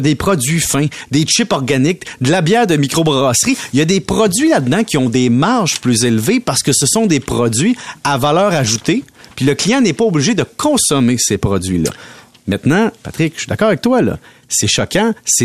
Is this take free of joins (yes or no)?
yes